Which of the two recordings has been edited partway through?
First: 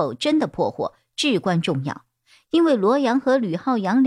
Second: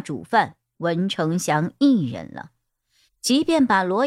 second; 1 cut; at 3.1 s

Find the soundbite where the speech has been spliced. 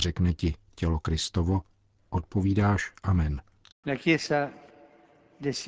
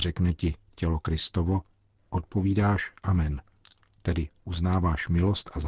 first; 1 cut; at 3.7 s

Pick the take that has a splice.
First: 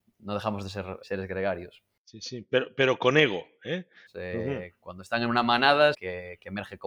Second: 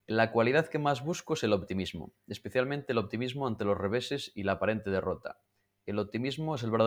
first; 3 cuts; at 1.0 s, 4.1 s, 5.9 s

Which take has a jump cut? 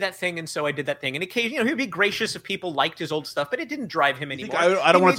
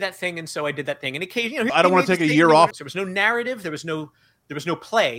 second; 2 cuts; at 1.7 s, 2.7 s

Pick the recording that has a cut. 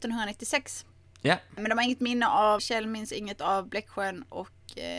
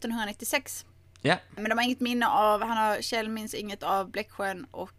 first; 1 cut; at 2.6 s

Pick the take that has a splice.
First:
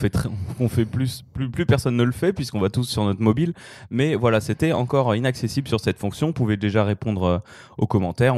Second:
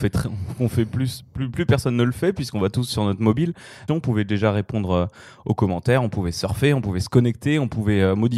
second; 1 cut; at 3.9 s

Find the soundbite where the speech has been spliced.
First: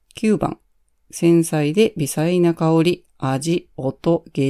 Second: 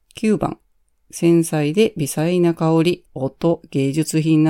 second; 1 cut; at 3.1 s

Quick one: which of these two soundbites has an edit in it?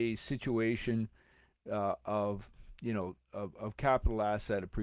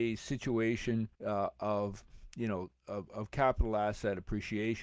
second; 1 cut; at 1.1 s

